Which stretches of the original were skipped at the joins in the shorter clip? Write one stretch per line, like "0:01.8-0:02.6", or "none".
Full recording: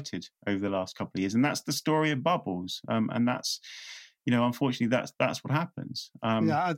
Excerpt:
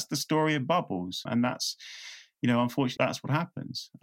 0:02.8-0:03.1
0:04.8-0:05.2